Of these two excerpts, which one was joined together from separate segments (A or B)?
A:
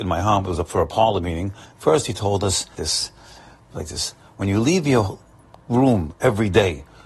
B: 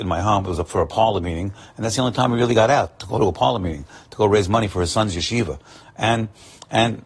A